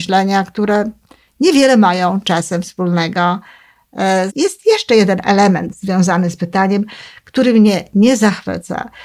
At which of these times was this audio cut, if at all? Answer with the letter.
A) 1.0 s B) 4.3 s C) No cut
B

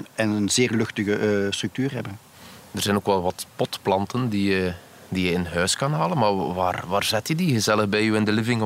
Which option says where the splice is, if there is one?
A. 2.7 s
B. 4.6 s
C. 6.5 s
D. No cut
D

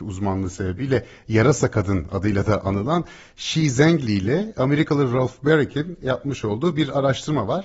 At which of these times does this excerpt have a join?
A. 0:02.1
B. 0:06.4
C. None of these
C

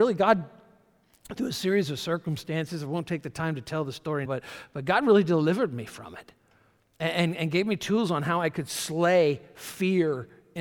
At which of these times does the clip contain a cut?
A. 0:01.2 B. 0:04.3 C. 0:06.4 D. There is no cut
B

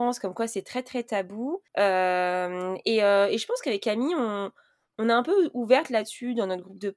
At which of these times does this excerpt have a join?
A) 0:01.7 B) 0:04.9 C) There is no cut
A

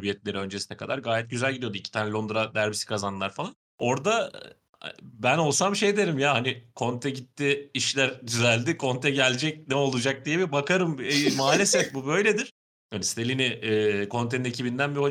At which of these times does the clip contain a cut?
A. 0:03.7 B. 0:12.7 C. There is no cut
A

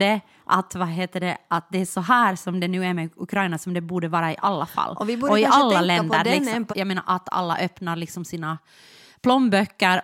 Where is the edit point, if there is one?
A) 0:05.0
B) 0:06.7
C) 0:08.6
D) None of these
B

